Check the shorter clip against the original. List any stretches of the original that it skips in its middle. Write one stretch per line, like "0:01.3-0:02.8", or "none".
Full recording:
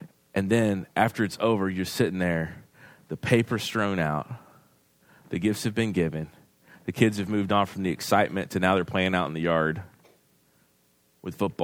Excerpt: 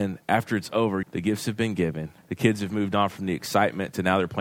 0:01.7-0:05.2
0:06.4-0:06.7